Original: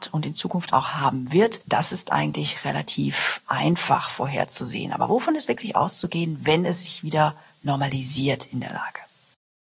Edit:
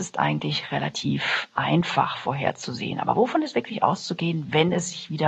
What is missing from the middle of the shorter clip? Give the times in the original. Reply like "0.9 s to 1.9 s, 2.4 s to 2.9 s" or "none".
none